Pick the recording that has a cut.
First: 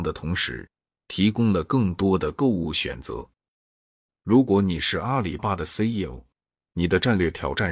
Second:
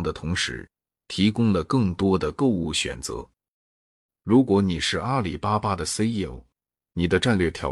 first; 1 cut; at 5.4 s

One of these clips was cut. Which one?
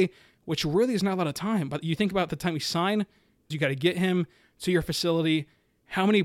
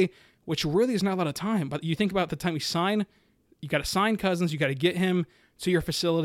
first; 1 cut; at 3.5 s

